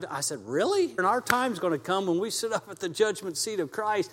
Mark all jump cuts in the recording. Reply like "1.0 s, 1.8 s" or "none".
1.0 s